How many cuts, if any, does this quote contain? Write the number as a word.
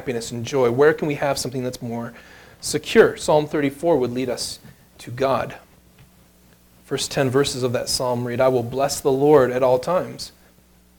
zero